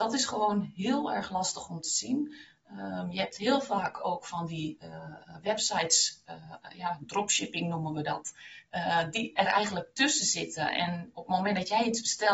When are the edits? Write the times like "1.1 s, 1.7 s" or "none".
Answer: none